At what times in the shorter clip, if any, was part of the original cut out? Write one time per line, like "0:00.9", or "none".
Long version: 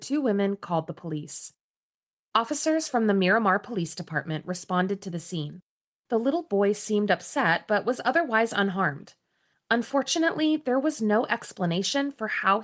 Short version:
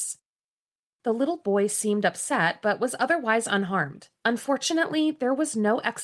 0:00.9
0:04.2